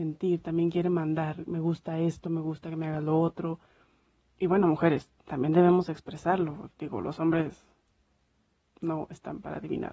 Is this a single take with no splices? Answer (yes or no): yes